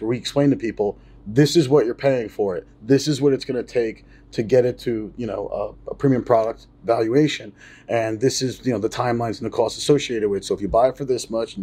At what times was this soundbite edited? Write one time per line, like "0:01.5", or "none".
none